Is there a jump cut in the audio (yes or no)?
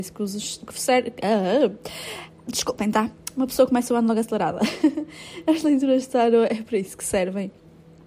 no